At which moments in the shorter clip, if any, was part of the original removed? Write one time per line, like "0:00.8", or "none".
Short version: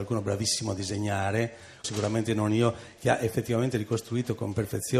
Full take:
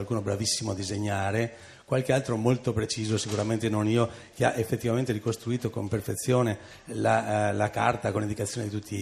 0:01.8